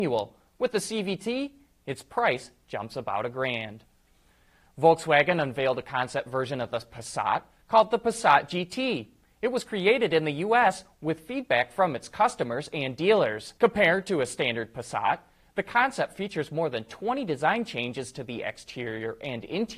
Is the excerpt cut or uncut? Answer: cut